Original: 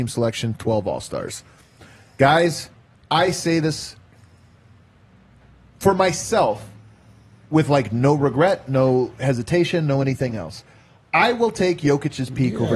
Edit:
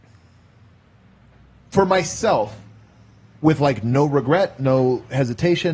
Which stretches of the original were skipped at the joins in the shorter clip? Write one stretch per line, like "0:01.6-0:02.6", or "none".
none